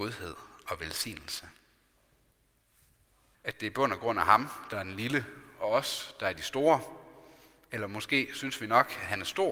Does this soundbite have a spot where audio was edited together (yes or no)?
yes